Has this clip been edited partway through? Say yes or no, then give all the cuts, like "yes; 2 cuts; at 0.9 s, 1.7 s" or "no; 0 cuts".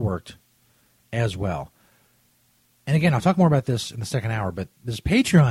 no; 0 cuts